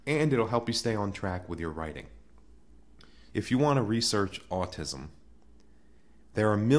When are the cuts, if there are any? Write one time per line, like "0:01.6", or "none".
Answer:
0:03.3